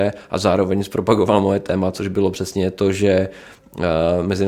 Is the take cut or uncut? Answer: uncut